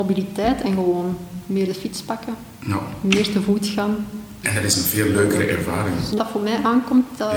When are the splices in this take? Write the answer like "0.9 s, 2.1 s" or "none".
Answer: 4.4 s, 6.2 s